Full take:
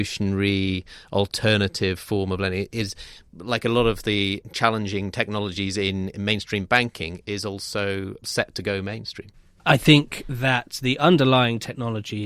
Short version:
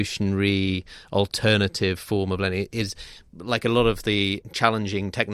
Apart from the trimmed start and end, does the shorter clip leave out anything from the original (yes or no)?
no